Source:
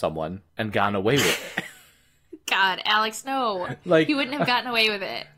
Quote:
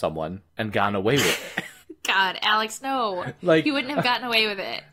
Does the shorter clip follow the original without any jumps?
no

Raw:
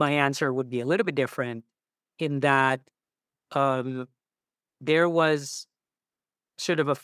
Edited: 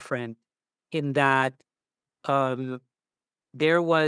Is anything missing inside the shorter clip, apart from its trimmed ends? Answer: no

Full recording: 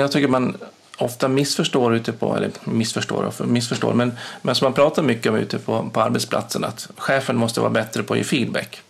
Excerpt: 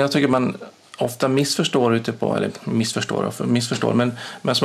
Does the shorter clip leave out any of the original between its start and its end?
no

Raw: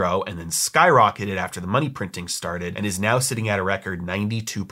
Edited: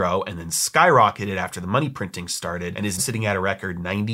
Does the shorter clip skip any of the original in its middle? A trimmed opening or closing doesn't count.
yes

